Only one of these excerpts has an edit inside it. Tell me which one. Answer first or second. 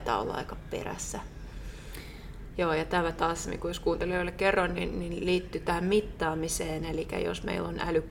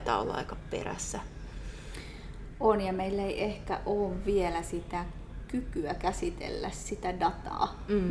first